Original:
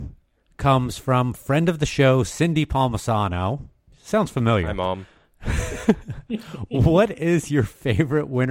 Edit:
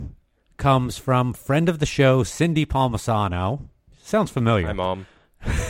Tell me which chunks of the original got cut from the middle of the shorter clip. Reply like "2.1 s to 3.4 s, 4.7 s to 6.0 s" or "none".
none